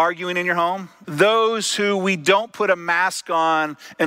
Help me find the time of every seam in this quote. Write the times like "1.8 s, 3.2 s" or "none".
1.0 s